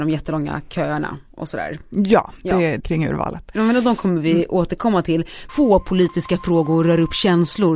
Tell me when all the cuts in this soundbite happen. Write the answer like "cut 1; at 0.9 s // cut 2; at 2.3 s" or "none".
cut 1; at 2.8 s // cut 2; at 5.5 s